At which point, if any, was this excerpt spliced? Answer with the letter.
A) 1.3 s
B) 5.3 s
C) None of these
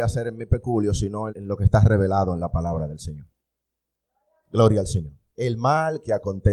A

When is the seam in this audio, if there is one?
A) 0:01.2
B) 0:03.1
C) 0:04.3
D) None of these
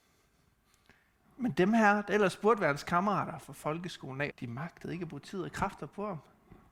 C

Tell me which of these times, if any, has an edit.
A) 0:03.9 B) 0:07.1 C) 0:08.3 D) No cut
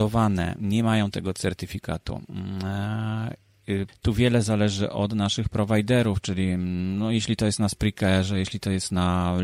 A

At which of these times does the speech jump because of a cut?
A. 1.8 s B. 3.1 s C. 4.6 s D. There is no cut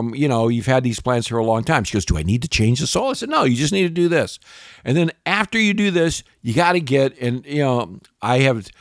D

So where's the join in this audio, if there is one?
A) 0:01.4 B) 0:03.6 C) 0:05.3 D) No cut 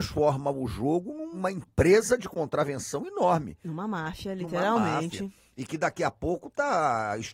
D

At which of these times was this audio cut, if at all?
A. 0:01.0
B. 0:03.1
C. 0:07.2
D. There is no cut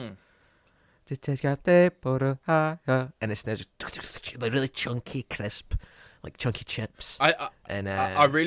D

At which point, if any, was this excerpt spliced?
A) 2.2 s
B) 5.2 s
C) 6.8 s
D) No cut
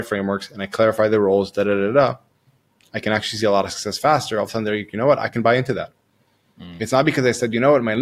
D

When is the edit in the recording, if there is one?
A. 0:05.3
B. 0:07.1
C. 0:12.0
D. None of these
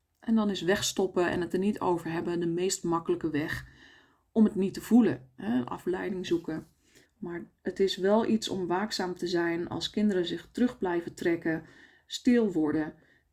B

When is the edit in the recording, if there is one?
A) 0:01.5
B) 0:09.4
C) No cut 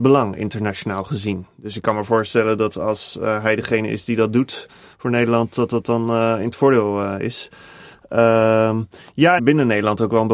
B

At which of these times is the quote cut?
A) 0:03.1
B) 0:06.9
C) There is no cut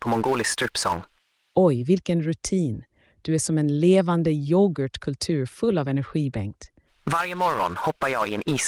B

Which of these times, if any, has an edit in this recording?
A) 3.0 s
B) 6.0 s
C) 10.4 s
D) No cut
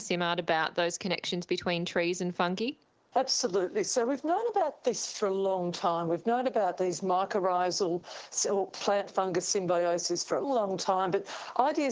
C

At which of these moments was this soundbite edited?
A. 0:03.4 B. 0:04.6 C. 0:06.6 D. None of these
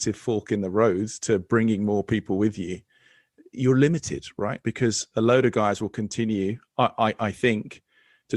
B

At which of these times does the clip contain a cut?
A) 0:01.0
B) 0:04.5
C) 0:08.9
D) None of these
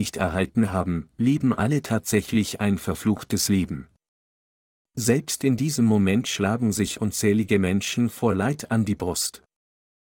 D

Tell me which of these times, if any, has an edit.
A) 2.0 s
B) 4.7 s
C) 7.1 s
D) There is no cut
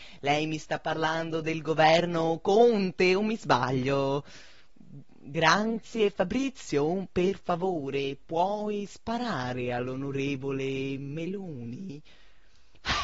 B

